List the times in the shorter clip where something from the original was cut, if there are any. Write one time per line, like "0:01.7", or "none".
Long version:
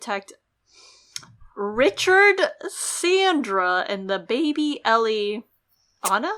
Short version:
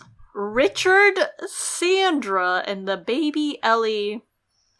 none